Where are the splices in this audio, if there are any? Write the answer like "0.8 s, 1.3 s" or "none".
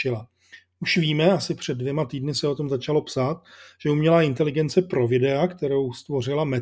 none